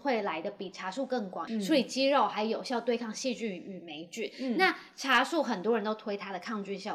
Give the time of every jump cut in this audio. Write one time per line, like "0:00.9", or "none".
0:01.5